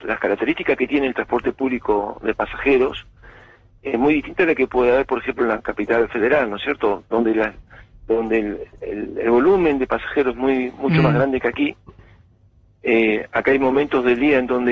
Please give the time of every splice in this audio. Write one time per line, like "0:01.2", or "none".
none